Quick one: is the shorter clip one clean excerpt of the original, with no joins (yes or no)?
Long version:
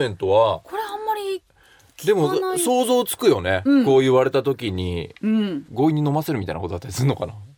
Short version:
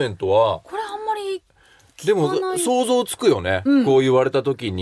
yes